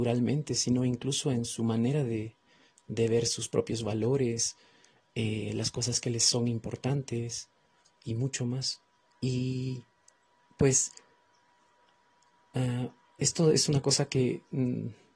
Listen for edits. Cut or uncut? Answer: cut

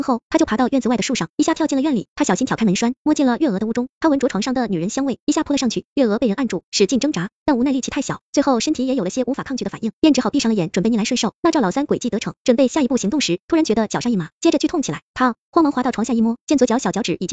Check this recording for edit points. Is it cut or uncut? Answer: uncut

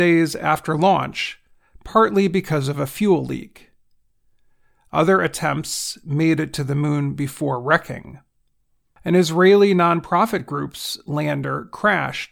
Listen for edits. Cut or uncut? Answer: uncut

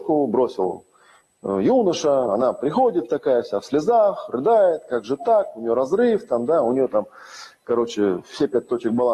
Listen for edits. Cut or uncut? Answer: uncut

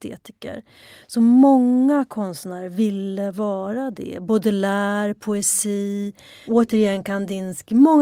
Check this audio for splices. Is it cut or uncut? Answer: cut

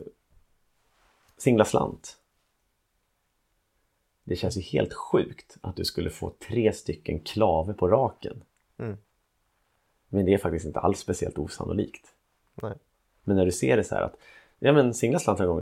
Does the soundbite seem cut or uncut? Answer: uncut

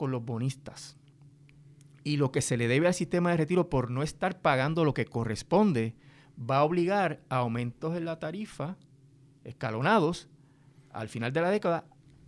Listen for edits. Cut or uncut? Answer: uncut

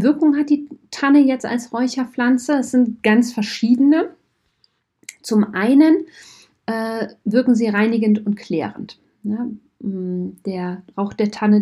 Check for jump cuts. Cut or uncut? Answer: uncut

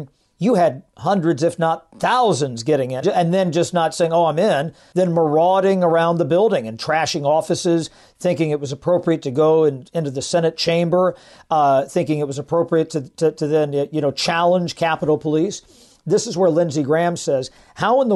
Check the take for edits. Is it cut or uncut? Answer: cut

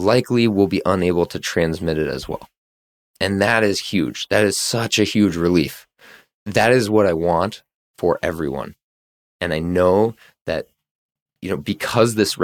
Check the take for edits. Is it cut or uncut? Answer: uncut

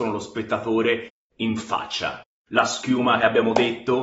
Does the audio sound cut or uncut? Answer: uncut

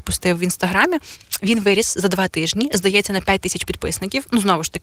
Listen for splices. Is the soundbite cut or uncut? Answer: uncut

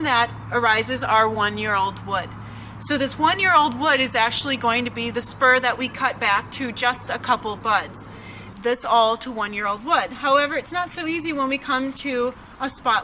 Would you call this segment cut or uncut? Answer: cut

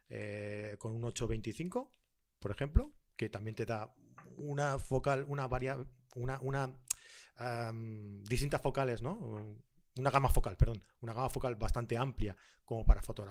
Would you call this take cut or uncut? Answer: uncut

